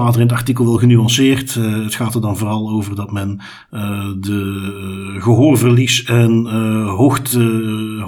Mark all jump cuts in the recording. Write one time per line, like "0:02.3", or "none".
none